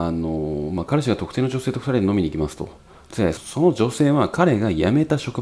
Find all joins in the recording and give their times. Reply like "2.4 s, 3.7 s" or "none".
3.4 s